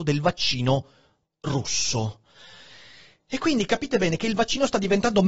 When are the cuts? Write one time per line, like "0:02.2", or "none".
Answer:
none